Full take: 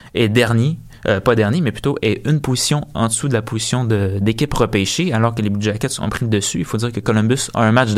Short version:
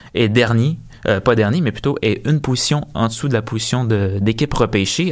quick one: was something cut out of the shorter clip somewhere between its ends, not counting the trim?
no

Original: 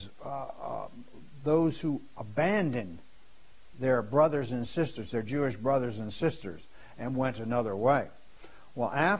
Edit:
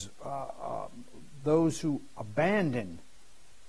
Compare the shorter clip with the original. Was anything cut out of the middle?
no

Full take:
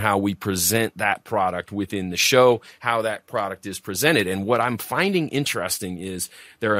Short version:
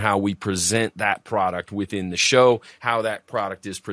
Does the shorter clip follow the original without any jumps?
yes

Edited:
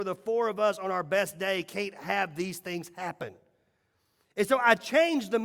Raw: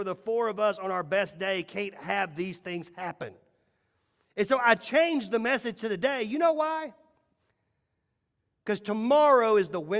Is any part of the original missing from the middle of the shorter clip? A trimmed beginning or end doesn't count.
no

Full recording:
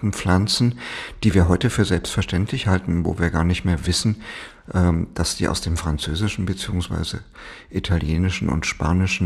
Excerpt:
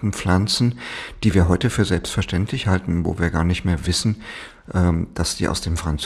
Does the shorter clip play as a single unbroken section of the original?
yes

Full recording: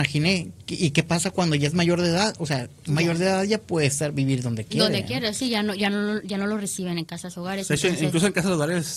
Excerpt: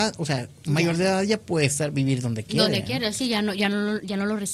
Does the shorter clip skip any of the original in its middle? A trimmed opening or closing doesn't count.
no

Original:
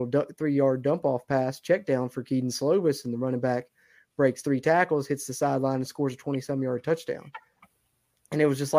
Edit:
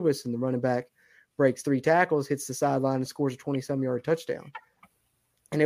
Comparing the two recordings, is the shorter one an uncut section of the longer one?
yes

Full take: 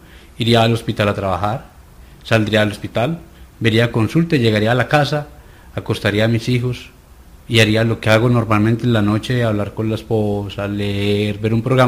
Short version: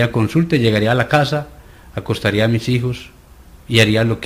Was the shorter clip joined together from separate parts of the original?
no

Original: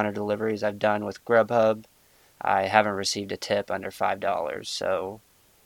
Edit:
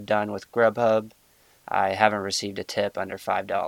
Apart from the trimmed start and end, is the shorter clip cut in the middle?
no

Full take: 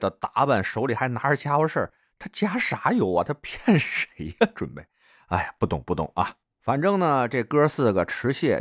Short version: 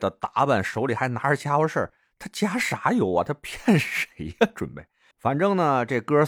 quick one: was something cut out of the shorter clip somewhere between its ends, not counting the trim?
yes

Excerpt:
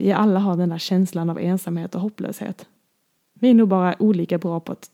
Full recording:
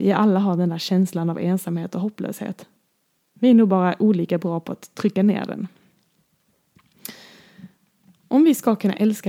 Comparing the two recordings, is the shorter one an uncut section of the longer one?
yes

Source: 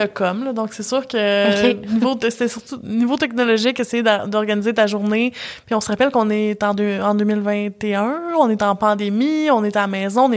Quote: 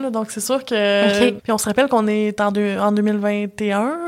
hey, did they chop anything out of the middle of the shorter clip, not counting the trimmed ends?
yes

